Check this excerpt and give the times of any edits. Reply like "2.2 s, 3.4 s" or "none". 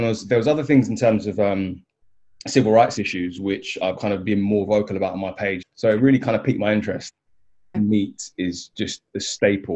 4.0 s, 5.6 s, 7.7 s